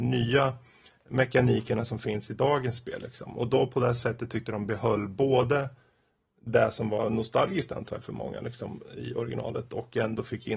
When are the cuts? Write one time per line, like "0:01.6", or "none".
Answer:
none

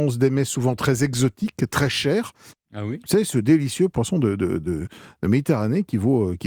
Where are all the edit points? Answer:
0:02.5

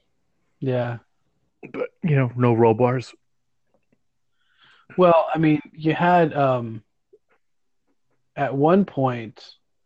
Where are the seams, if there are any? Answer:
none

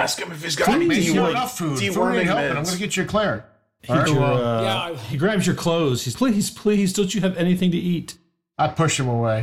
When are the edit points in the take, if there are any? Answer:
0:04.1
0:06.1

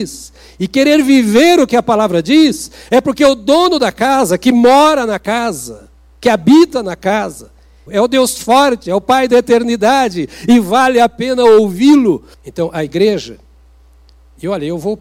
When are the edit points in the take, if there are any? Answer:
0:07.9
0:12.3

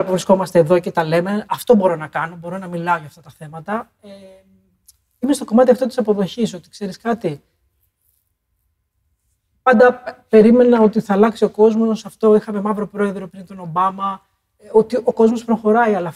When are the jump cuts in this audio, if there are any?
0:13.3

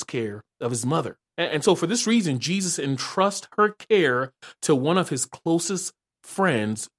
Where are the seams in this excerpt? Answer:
0:01.4

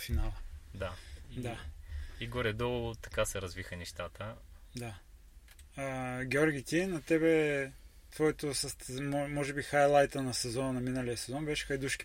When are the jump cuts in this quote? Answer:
none

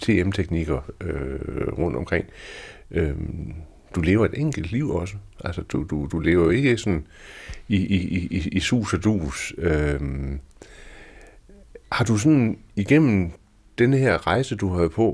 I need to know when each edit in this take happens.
0:11.8

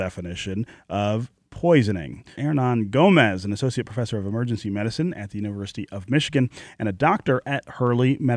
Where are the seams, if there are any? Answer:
0:02.3

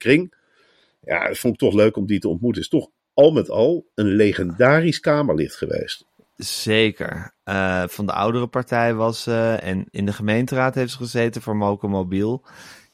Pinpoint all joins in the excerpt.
0:09.9

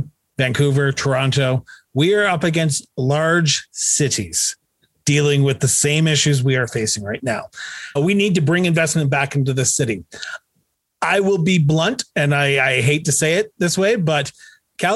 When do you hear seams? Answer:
0:08.0

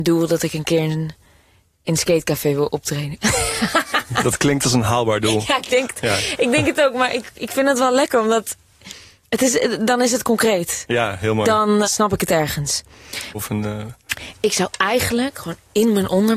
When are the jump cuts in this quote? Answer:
0:11.8
0:13.3

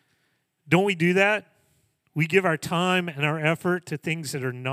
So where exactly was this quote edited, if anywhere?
none

